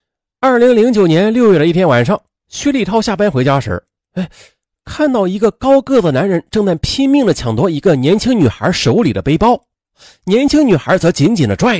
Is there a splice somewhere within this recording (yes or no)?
no